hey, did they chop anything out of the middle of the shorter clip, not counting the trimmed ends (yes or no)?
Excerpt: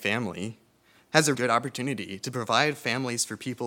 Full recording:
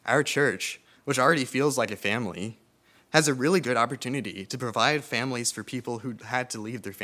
yes